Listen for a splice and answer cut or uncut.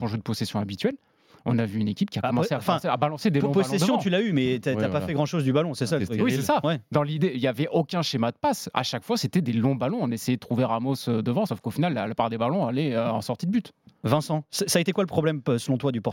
uncut